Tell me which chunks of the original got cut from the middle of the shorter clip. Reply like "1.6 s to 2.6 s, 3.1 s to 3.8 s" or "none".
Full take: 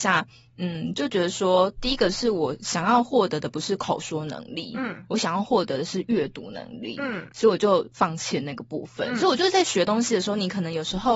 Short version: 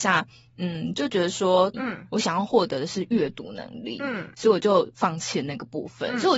1.7 s to 4.7 s